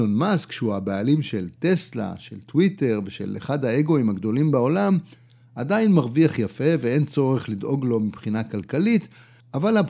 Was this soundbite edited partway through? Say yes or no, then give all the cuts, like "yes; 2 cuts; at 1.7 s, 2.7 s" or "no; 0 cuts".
no; 0 cuts